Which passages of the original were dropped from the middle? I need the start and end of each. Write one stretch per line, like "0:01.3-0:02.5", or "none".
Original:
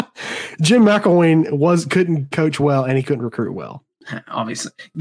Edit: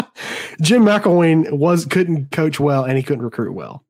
none